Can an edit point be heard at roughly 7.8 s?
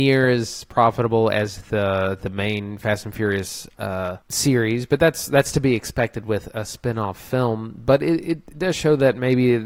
no; 1 cut; at 4.2 s

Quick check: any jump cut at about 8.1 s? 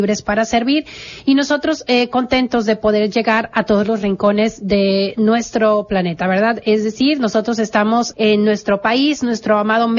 yes; 1 cut; at 8.1 s

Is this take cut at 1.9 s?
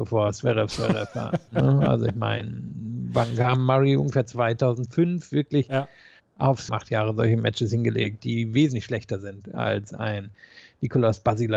no; 2 cuts; at 6.7 s, 8.2 s

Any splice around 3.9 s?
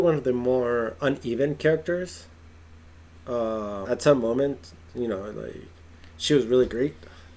yes; 1 cut; at 3.9 s

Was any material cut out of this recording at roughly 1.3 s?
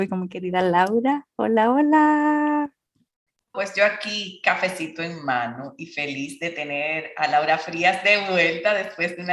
no; 1 cut; at 3.5 s

